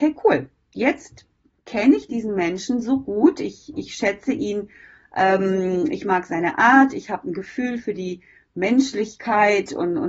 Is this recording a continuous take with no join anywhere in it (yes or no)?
yes